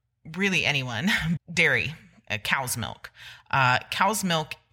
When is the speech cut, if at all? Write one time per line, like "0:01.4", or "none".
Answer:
0:01.4